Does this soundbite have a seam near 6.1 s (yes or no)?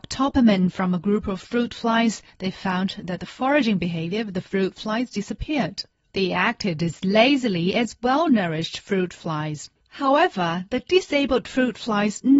yes